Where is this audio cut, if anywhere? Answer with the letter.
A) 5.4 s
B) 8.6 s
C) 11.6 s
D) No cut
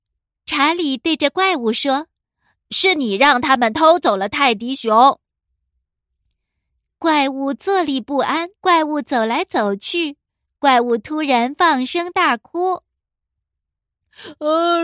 B